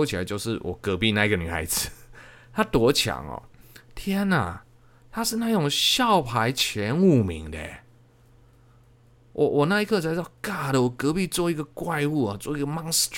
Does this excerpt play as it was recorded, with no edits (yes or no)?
yes